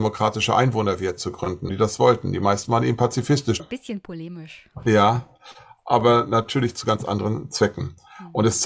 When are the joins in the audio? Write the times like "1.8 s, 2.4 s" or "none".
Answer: 1.7 s, 3.6 s